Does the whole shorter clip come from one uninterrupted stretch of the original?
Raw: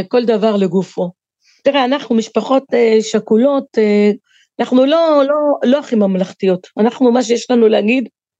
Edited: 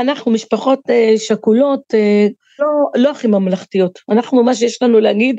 no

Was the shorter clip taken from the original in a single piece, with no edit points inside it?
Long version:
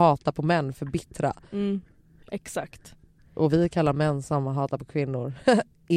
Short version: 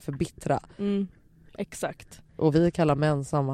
no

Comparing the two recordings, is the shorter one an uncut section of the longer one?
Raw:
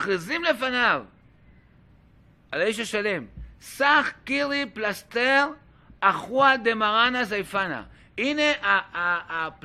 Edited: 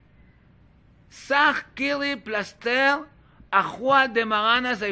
no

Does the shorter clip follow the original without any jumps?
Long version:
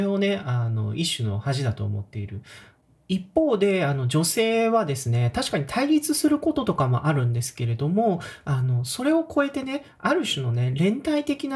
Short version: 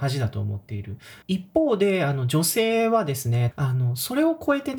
no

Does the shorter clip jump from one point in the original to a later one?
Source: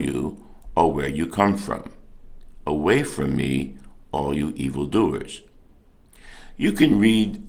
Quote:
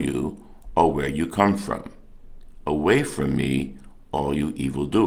no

